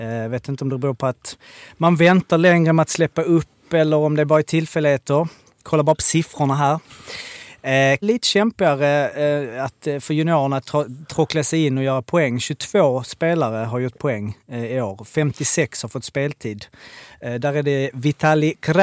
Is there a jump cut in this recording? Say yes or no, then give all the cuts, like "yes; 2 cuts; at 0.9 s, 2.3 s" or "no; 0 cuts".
yes; 1 cut; at 8.0 s